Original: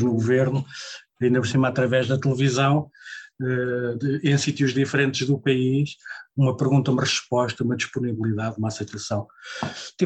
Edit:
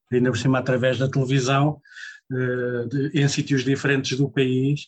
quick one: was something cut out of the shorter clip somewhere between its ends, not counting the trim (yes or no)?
no